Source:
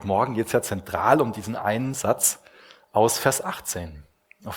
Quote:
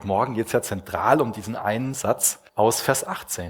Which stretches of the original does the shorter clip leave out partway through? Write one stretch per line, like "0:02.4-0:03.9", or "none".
0:02.5-0:02.9

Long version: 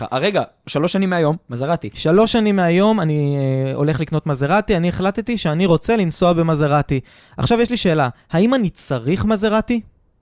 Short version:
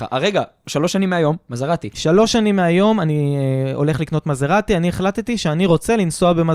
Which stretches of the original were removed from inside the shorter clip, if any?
none

